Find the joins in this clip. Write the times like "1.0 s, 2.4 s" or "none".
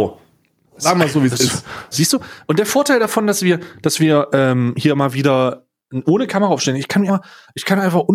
1.9 s, 7.1 s